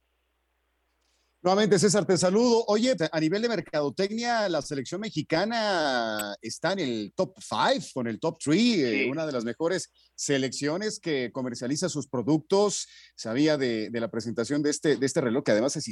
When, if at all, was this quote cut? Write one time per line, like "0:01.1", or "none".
0:03.0